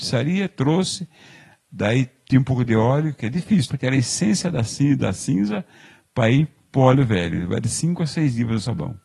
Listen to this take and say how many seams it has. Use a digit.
1